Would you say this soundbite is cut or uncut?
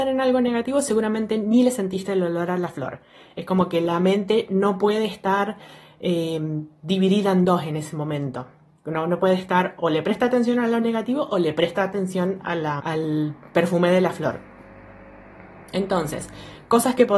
cut